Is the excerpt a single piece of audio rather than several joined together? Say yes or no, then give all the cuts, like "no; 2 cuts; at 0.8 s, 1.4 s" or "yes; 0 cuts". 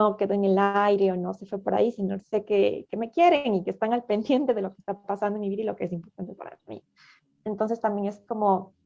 no; 1 cut; at 2.2 s